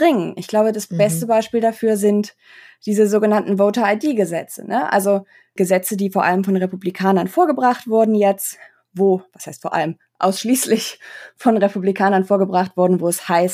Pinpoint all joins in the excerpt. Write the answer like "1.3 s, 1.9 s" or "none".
none